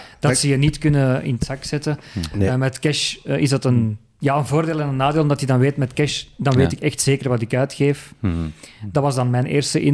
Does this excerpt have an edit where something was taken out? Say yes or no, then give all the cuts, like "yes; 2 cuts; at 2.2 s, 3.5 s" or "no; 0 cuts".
no; 0 cuts